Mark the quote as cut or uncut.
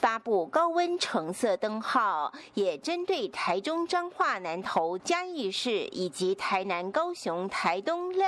uncut